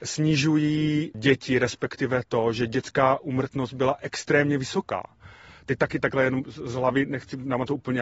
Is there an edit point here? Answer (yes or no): no